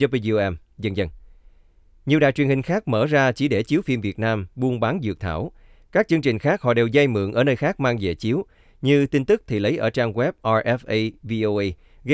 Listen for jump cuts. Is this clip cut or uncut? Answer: uncut